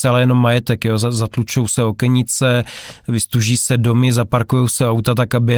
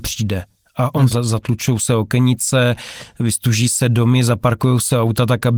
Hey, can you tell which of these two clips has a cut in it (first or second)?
second